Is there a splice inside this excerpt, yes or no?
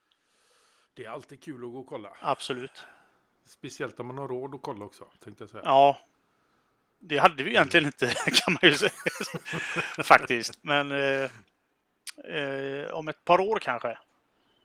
no